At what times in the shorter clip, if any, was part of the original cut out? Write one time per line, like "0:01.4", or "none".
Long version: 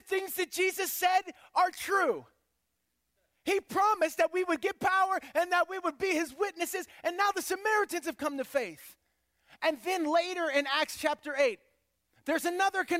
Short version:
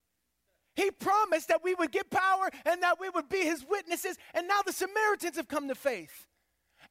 none